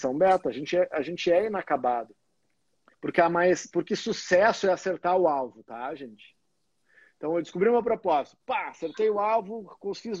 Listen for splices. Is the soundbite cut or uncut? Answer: cut